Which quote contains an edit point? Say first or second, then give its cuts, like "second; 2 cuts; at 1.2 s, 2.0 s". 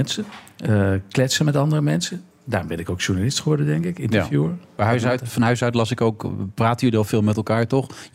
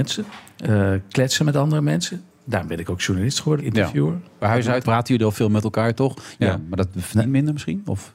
second; 3 cuts; at 3.6 s, 4.8 s, 6.4 s